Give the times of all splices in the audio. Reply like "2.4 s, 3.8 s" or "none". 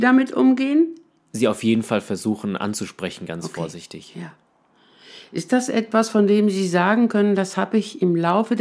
none